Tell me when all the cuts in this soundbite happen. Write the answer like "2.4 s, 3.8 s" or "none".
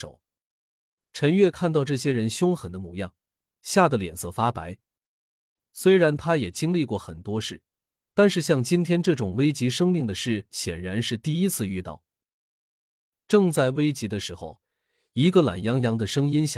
none